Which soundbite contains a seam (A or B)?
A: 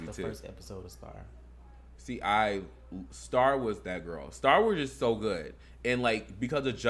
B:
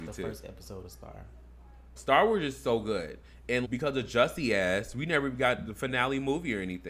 B